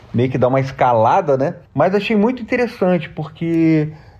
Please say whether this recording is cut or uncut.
cut